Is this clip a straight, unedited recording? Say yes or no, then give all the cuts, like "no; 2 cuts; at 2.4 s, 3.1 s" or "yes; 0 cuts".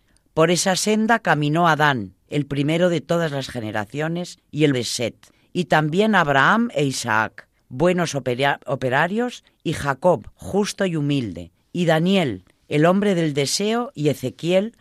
no; 1 cut; at 4.7 s